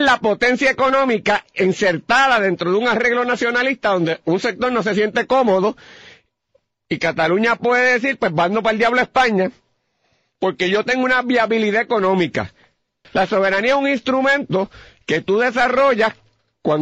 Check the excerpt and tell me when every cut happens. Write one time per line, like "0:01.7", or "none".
0:13.0